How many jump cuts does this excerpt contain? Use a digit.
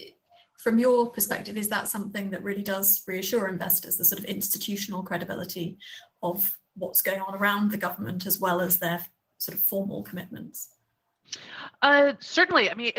0